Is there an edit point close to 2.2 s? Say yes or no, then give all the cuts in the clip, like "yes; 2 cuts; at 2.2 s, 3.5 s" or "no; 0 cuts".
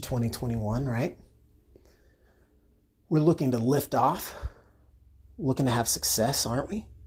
no; 0 cuts